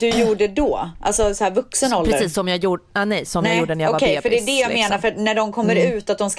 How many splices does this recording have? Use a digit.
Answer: 0